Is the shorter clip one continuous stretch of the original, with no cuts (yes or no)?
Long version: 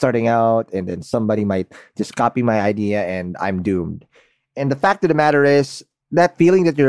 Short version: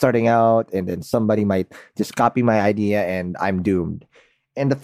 yes